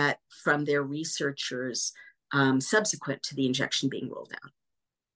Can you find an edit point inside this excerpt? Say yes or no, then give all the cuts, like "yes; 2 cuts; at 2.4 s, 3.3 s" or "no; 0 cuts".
no; 0 cuts